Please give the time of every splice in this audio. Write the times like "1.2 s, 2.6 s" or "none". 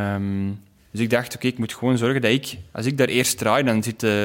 none